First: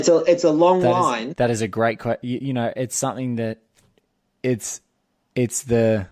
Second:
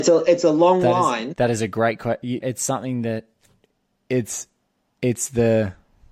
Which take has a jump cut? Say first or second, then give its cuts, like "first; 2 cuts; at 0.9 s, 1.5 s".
second; 1 cut; at 2.4 s